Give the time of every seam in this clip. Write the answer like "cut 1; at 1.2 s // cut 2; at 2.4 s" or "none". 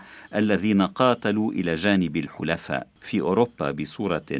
cut 1; at 3.0 s